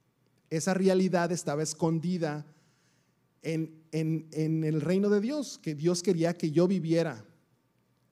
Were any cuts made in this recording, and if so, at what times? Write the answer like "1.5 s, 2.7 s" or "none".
none